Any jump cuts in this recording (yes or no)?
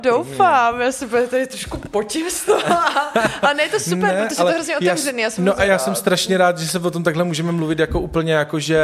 no